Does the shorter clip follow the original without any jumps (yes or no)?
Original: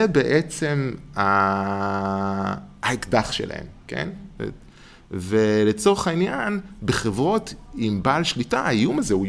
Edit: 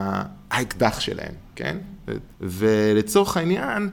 no